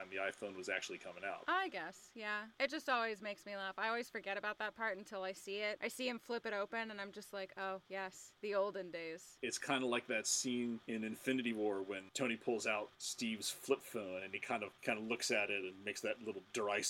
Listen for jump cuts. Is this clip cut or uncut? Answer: uncut